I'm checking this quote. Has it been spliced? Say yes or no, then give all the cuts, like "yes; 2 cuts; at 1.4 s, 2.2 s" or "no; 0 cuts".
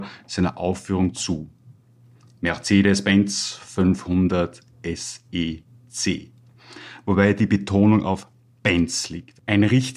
no; 0 cuts